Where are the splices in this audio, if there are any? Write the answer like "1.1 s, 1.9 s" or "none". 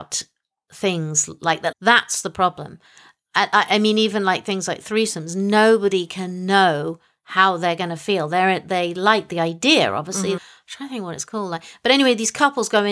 1.7 s, 10.4 s